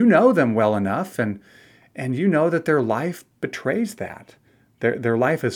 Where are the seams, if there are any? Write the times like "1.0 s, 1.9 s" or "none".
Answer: none